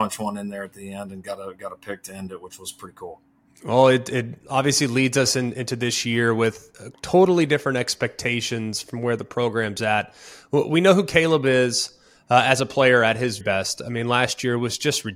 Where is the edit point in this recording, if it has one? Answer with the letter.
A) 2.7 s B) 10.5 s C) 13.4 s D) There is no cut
C